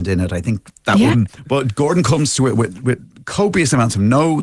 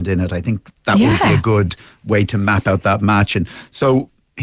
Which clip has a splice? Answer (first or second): first